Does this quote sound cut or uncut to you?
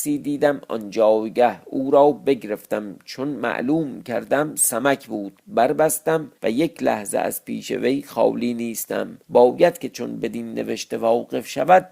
cut